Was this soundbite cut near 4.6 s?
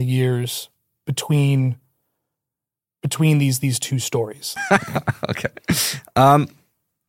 yes; 1 cut; at 4.6 s

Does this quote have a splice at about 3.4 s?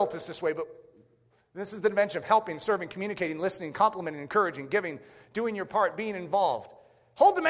no; 0 cuts

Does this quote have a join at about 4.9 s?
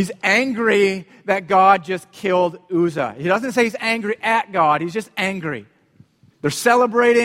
no; 1 cut; at 6.3 s

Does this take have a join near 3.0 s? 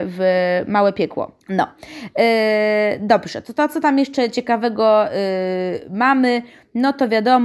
no; 1 cut; at 1.4 s

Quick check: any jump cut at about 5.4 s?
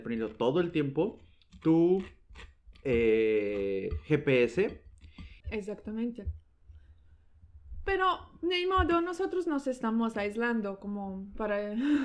yes; 1 cut; at 5.4 s

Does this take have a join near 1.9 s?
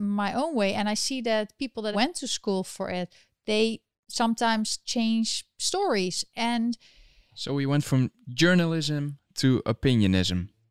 yes; 1 cut; at 1.9 s

